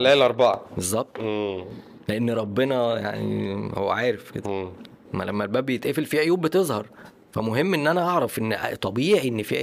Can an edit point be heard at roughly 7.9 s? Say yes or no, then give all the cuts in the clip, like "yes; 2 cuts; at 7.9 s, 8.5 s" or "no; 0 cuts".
no; 1 cut; at 5.0 s